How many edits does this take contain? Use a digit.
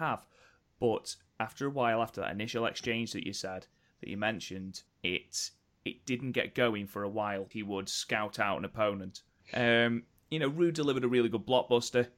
3